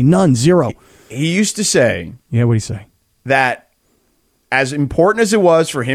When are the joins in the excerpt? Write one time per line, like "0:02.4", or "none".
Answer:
none